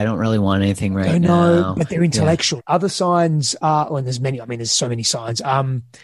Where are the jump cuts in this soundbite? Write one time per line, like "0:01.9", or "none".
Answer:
0:02.6